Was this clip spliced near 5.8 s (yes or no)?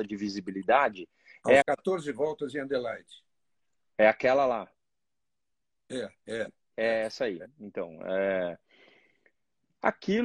no